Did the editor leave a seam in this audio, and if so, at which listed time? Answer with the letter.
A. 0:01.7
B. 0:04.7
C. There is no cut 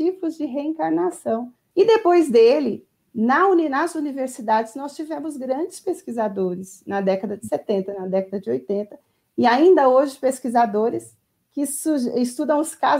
A